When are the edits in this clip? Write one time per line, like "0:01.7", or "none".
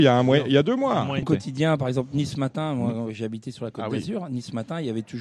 0:01.2

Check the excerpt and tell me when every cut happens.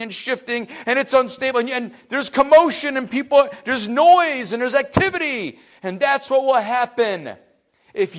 none

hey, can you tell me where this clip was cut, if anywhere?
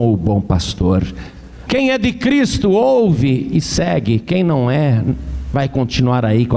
0:01.7

